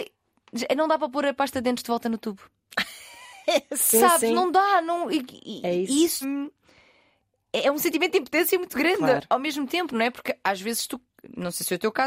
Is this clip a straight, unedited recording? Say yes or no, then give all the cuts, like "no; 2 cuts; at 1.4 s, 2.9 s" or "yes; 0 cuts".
no; 1 cut; at 6.2 s